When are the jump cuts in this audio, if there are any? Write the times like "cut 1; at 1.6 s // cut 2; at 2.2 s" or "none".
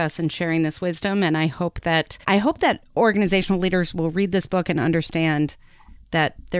cut 1; at 2.2 s